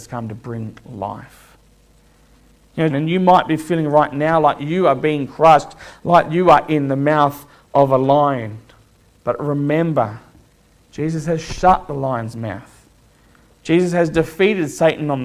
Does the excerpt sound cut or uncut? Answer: cut